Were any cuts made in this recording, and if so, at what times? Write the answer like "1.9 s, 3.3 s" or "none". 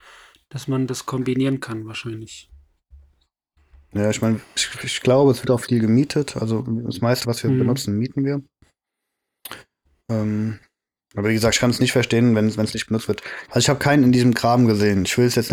7.2 s, 13.5 s